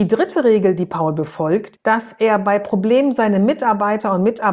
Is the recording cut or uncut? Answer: cut